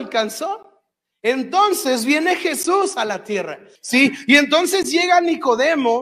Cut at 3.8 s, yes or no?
yes